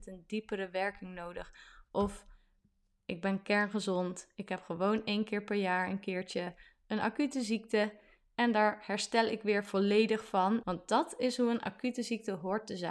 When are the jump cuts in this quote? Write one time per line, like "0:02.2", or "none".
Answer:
0:10.6